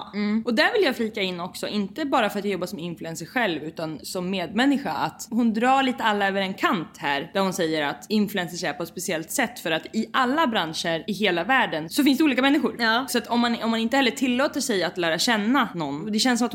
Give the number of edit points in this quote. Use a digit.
0